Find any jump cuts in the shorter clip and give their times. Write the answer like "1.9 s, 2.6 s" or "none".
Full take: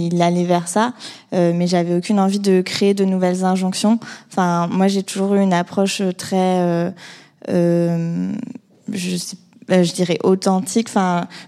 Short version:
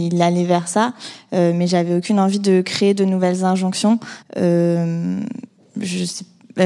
4.2 s